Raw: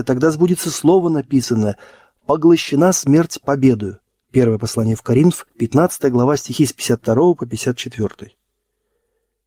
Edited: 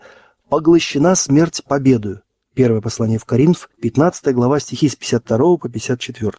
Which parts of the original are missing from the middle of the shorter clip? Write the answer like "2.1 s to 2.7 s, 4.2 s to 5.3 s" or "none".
none

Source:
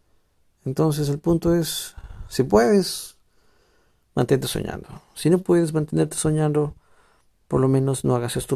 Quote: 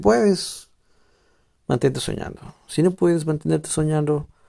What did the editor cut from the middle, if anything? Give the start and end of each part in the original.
none

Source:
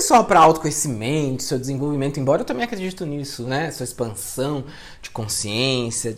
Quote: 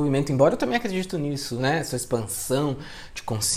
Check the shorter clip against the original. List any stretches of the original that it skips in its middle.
none

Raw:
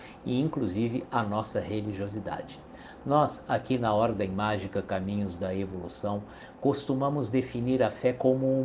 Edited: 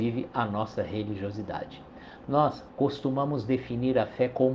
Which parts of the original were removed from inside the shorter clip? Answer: 3.5 s to 6.5 s

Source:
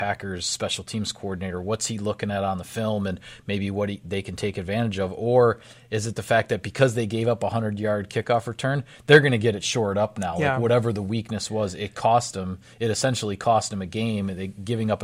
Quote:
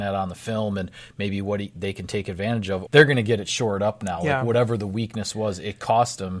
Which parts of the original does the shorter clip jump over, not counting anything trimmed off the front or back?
5.2 s to 9.0 s

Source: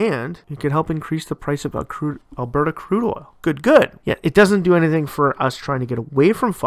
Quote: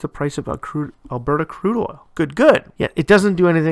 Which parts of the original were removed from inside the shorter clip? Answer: none

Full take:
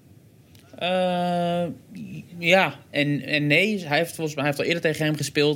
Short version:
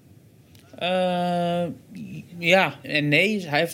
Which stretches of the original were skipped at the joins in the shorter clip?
2.8 s to 3.2 s

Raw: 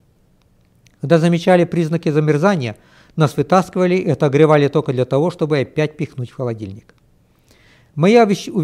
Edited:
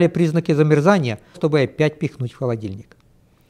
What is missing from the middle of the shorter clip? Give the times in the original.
2.9 s to 5.3 s

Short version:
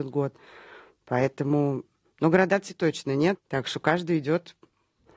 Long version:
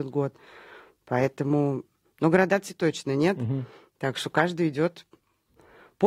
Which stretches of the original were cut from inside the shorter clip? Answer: 3.4 s to 3.9 s

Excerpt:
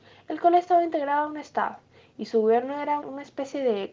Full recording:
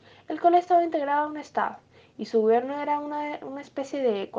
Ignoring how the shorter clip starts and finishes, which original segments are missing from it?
3.0 s to 3.4 s

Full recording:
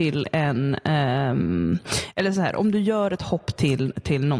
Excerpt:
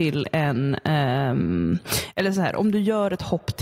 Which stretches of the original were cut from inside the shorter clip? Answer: none

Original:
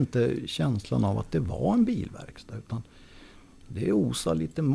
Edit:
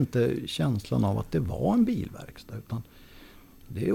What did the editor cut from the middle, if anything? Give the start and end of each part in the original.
none

